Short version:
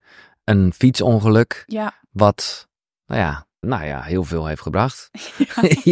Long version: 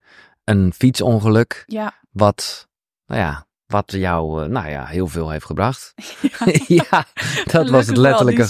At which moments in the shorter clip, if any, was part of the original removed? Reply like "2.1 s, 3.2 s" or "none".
3.6 s